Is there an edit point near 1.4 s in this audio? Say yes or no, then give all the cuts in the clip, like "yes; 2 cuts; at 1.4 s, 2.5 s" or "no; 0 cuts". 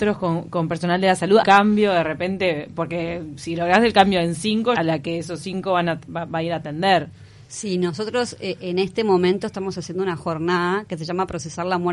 yes; 2 cuts; at 1.4 s, 4.8 s